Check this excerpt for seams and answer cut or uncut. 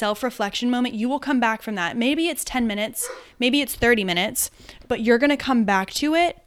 uncut